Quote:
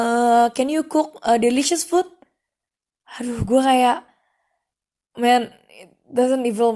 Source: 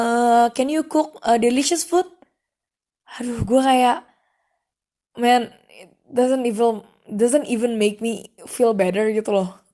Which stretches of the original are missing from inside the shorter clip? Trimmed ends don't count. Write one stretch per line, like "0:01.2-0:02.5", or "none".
none